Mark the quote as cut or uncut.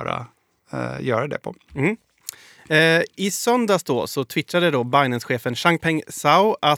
uncut